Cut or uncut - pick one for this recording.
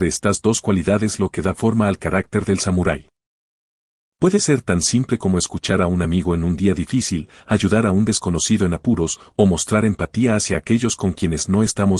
cut